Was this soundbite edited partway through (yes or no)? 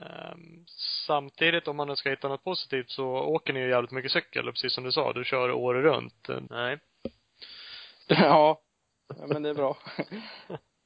yes